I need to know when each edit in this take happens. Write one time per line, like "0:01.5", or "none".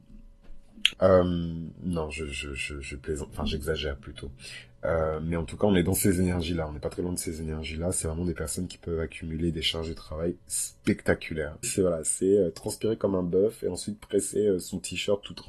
0:00.9
0:11.6